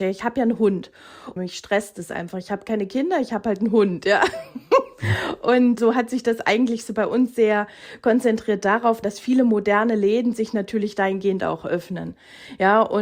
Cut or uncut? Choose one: cut